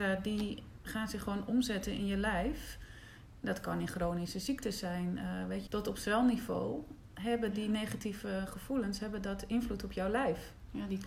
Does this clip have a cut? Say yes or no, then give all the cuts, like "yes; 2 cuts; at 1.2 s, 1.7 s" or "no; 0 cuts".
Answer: yes; 1 cut; at 5.7 s